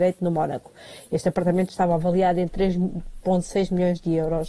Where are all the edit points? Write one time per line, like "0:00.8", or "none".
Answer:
none